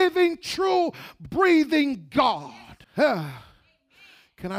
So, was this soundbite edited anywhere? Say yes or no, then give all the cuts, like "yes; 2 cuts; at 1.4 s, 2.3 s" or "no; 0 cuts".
yes; 1 cut; at 2.8 s